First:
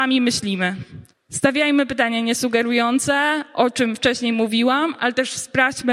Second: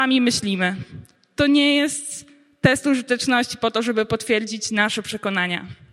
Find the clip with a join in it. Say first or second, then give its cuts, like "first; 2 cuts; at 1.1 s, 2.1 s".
first; 1 cut; at 1.1 s